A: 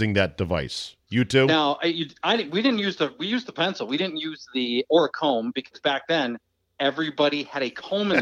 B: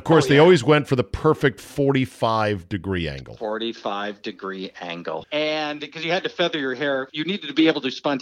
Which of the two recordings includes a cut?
B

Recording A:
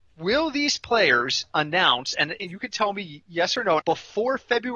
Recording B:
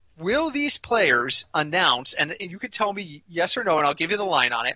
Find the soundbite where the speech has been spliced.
A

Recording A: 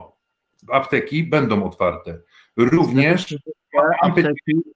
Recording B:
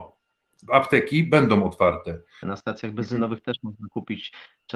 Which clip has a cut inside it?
B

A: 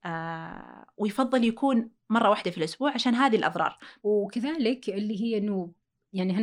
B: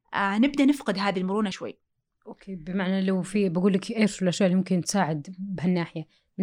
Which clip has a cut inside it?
B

